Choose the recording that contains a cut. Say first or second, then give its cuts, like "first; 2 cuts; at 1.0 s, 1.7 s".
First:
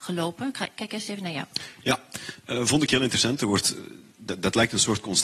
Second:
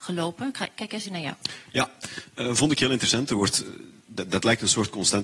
second; 1 cut; at 1.0 s